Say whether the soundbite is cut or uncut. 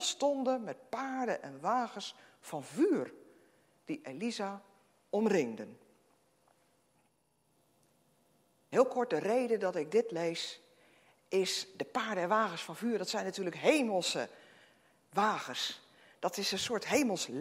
uncut